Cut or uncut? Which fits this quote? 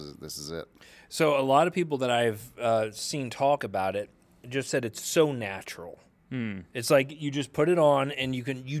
uncut